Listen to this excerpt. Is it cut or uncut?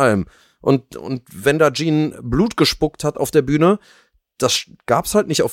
uncut